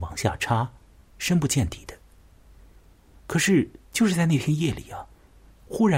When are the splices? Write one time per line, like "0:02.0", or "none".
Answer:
none